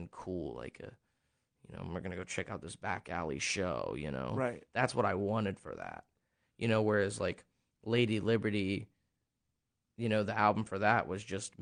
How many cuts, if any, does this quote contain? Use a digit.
0